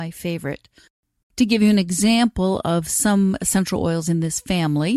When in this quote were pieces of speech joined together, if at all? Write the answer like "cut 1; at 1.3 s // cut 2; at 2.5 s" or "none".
cut 1; at 1.2 s